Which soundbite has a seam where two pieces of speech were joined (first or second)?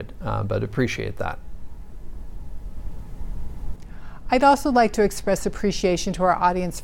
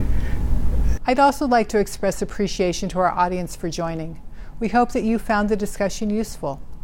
second